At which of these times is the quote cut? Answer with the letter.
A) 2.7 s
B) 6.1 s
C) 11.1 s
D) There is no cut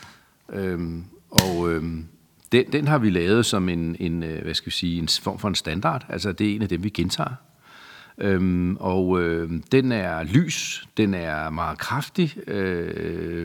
A